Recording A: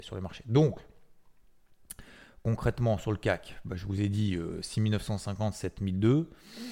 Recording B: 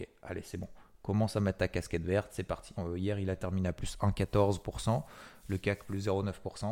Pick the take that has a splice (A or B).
B